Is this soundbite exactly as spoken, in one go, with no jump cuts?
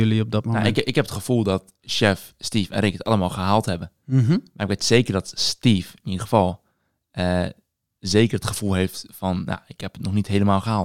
yes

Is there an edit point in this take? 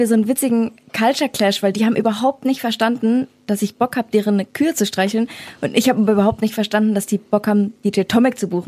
no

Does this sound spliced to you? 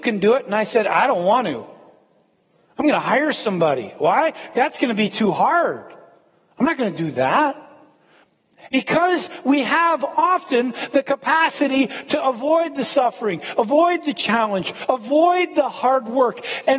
yes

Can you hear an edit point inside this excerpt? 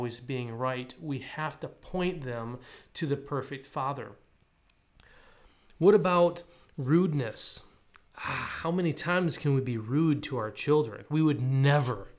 no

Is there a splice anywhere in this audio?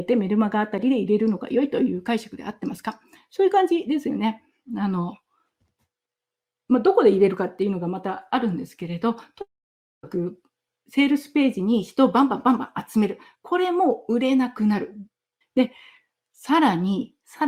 yes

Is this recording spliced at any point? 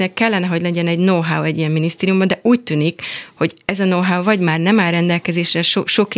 no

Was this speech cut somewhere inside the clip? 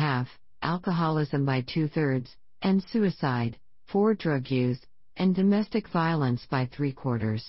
no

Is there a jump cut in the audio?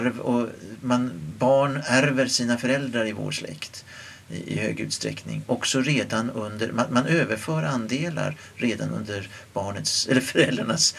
no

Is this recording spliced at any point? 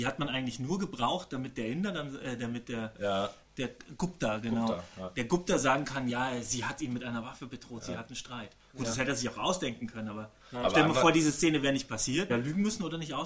yes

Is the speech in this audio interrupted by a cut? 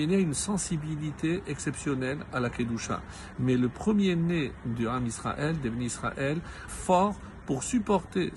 yes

